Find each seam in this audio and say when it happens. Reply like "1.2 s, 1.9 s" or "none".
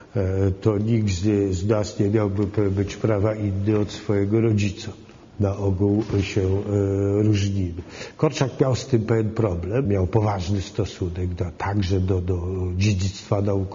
5.3 s, 9.8 s